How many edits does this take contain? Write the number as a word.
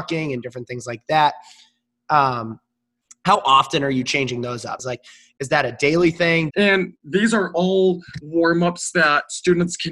two